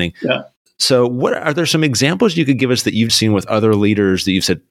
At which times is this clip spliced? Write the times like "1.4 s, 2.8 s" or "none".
3.1 s